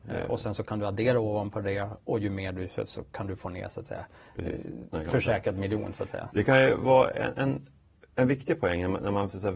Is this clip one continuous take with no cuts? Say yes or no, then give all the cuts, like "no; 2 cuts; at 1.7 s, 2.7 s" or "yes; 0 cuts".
no; 1 cut; at 4.9 s